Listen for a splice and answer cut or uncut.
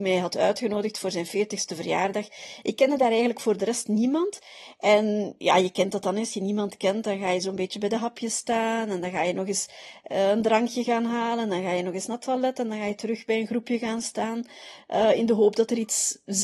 uncut